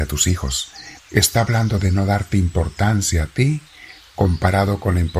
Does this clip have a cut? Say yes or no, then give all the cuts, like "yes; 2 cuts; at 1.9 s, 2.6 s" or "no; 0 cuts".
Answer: yes; 1 cut; at 1.0 s